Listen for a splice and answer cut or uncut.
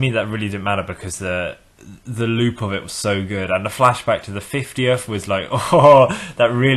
uncut